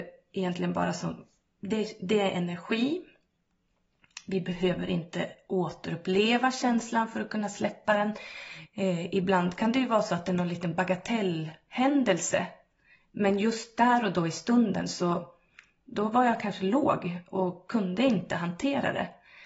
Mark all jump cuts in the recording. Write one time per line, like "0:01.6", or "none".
0:08.6